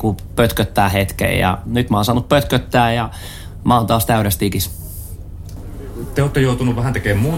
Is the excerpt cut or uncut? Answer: uncut